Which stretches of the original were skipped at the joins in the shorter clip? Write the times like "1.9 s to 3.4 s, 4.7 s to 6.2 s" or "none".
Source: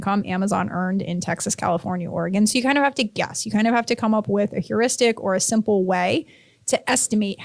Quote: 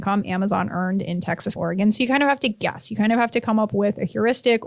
1.6 s to 2.1 s